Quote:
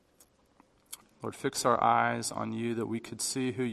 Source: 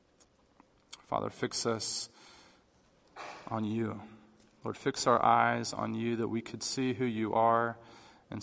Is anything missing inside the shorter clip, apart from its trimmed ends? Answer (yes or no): yes